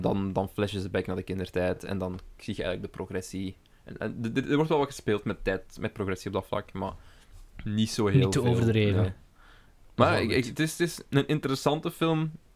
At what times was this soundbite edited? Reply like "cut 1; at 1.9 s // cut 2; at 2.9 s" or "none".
none